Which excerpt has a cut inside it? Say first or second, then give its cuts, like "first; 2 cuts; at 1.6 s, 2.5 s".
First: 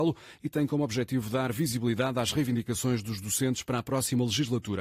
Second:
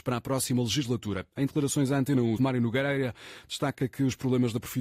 second; 1 cut; at 2.4 s